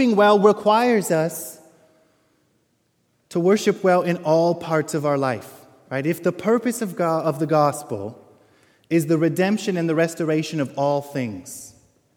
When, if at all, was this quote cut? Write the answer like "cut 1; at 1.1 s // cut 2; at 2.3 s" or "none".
none